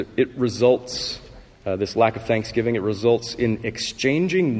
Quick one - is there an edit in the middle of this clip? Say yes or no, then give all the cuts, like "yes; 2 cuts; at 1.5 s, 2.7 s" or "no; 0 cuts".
no; 0 cuts